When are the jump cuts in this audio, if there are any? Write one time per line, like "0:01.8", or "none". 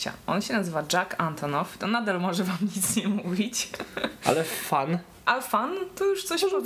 none